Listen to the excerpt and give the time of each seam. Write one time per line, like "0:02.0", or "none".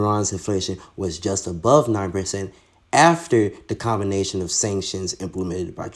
none